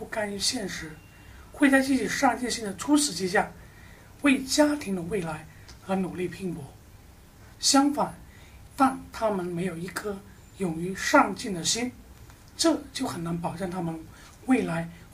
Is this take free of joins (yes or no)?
no